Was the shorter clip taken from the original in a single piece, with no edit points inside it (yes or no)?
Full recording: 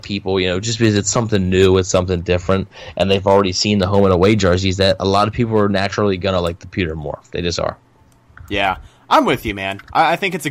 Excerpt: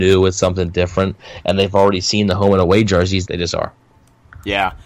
no